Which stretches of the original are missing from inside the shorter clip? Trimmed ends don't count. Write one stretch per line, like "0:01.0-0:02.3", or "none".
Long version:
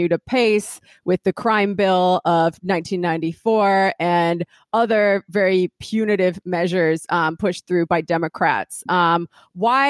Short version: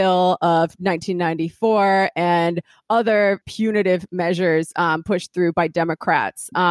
0:05.2-0:05.8